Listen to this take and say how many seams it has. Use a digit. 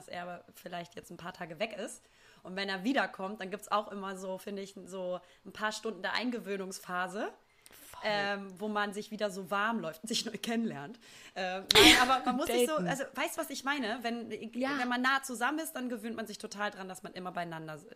0